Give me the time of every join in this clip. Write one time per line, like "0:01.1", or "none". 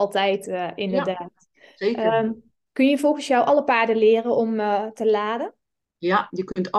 none